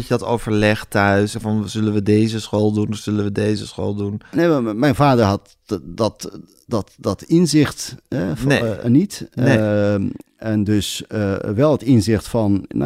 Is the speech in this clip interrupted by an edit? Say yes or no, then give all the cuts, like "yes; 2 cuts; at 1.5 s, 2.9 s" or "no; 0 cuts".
yes; 1 cut; at 1.3 s